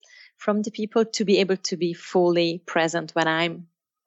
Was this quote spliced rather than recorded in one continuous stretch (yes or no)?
no